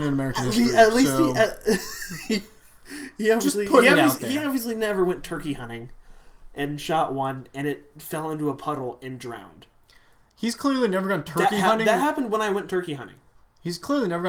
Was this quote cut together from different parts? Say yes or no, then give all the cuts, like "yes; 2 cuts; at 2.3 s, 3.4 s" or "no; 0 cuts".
no; 0 cuts